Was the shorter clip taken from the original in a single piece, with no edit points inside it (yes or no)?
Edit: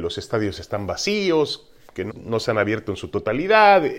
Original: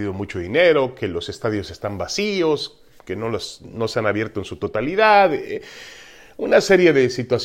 no